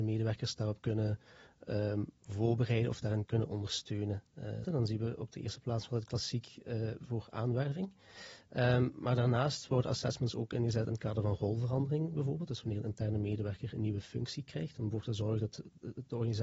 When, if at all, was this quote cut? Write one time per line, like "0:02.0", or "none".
0:03.3
0:04.6